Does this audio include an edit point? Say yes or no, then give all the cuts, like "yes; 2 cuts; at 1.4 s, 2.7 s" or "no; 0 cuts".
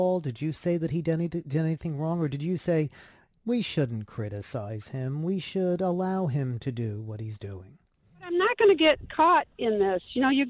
no; 0 cuts